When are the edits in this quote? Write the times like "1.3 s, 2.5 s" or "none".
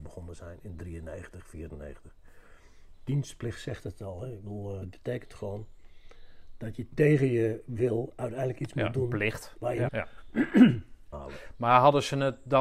4.8 s, 9.9 s, 11.1 s